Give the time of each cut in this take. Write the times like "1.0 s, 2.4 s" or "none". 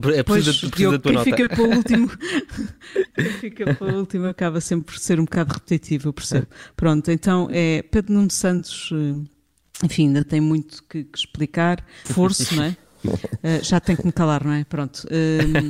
12.1 s